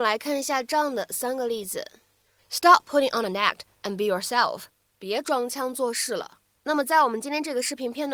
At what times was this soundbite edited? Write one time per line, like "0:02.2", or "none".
0:06.5